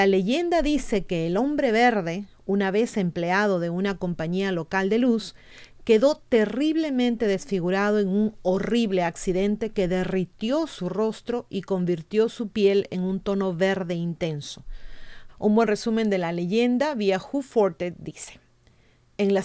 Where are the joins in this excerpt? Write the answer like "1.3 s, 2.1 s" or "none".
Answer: 15.3 s